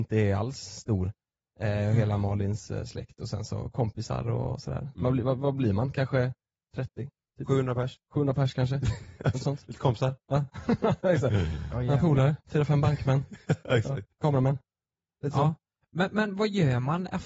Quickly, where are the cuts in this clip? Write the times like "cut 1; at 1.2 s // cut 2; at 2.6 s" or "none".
cut 1; at 12.4 s